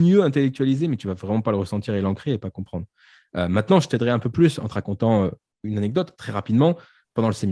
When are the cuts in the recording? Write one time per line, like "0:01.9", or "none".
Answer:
none